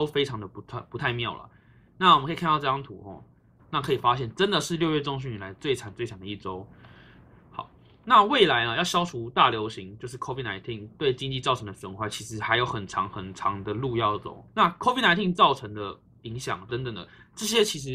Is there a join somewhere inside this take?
yes; 3 cuts; at 3.6 s, 14.5 s, 16.7 s

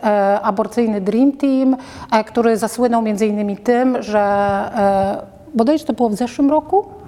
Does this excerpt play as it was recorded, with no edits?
yes; 0 cuts

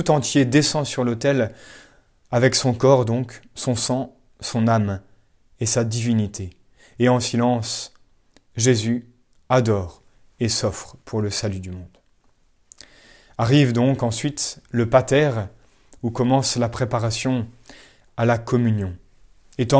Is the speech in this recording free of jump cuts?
yes; 0 cuts

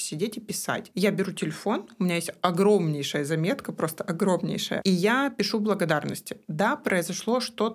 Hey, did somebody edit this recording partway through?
yes; 1 cut; at 6.5 s

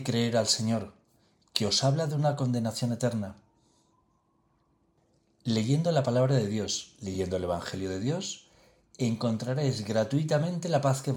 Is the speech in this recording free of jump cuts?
yes; 0 cuts

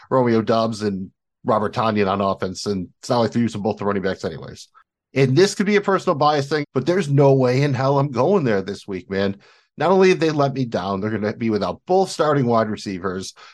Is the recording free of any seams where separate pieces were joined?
no; 1 cut; at 6.6 s

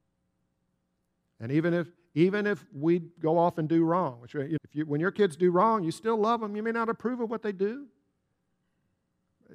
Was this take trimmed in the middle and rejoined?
yes; 1 cut; at 4.6 s

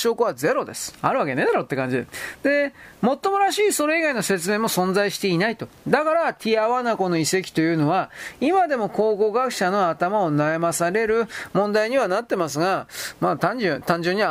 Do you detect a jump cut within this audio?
no; 0 cuts

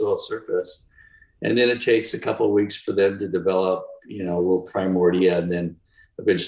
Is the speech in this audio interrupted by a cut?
no; 0 cuts

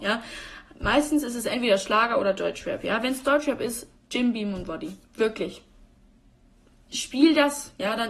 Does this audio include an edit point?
no; 0 cuts

